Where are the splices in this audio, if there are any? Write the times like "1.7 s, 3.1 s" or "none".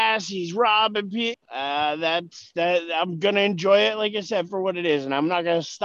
1.3 s